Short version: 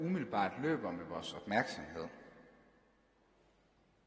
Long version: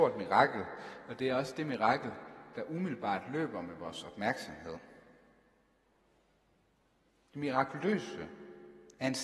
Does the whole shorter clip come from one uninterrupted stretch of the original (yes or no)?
yes